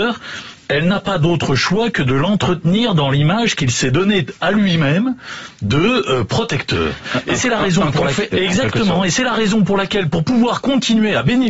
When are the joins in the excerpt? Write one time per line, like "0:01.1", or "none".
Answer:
0:08.3